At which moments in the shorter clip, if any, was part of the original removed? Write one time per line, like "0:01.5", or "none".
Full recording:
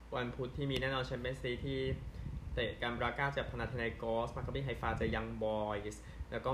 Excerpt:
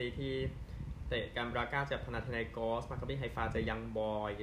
none